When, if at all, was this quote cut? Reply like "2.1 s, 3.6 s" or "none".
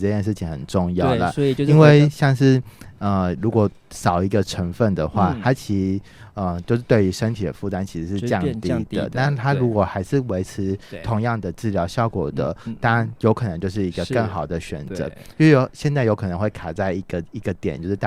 none

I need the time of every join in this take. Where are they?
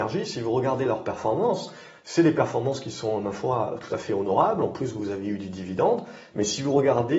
none

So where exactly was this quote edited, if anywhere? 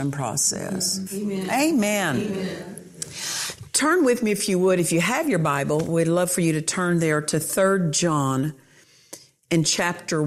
1.1 s

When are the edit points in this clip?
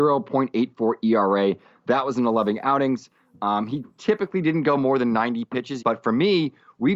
5.8 s

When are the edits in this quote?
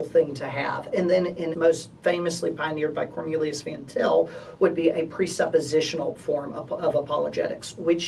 1.5 s

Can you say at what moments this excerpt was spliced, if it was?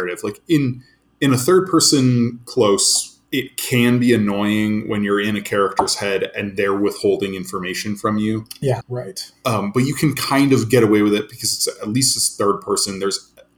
3.3 s, 8.8 s

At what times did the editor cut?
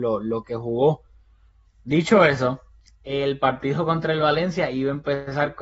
1.7 s

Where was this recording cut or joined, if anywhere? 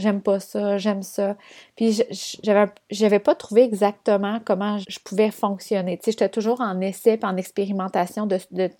4.8 s

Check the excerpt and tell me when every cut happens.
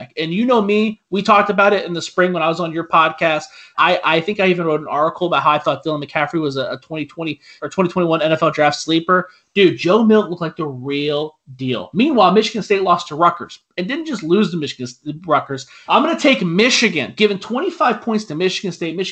3.7 s, 7.6 s, 15.9 s

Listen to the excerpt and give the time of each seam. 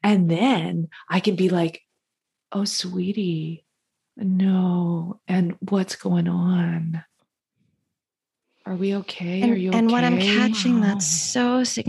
none

